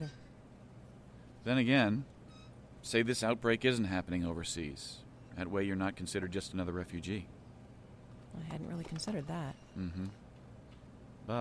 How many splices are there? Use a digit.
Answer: 1